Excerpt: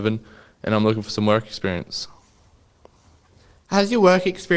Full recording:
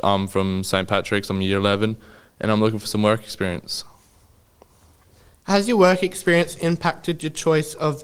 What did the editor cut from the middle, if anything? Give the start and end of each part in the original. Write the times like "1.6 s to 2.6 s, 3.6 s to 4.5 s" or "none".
none

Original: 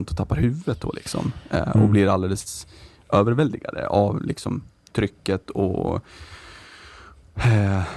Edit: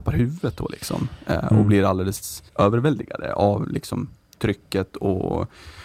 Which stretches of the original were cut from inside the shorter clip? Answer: 2.7 s to 3.0 s

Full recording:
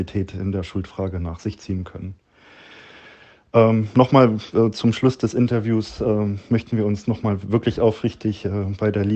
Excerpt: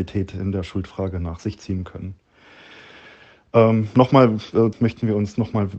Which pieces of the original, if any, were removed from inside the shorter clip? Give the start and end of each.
4.7 s to 6.4 s

